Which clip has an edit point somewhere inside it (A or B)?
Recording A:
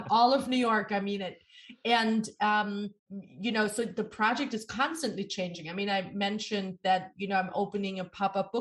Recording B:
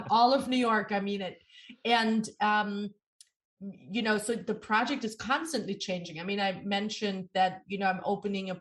A